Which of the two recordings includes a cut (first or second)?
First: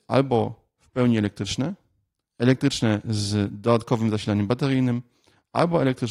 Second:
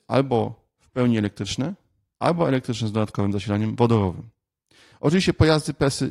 second